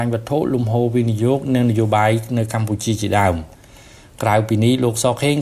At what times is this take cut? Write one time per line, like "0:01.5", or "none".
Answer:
none